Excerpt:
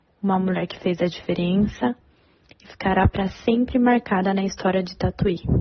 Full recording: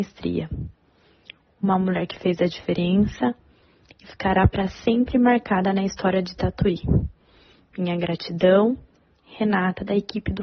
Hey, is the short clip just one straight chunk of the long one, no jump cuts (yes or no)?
yes